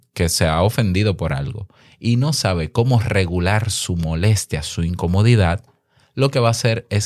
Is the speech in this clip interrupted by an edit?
no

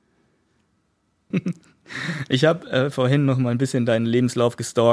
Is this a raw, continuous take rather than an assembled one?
no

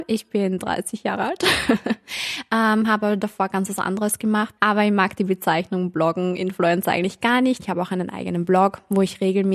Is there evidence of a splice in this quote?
yes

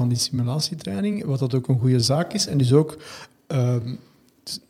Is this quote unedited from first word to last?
yes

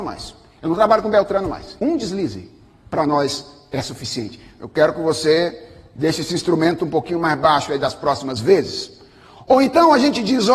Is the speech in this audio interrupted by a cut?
yes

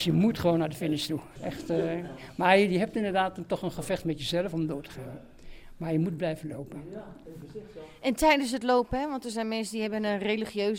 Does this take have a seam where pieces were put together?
yes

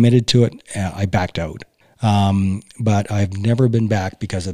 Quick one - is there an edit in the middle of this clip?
yes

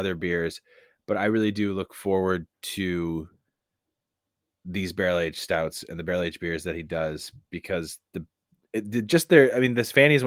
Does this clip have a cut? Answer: no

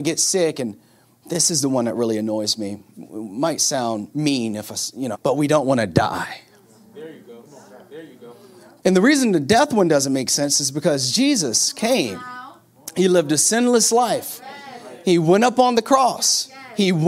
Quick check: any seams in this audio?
yes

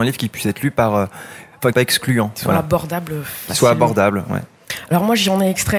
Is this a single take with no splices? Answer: no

